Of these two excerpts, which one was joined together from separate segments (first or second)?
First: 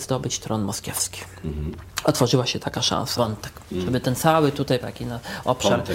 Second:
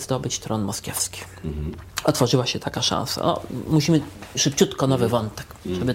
first